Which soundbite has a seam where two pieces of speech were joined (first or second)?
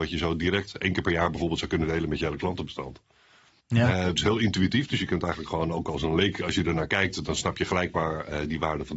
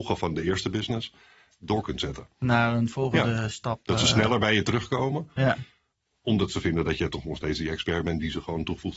first